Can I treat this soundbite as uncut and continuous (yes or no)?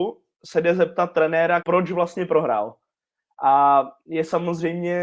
no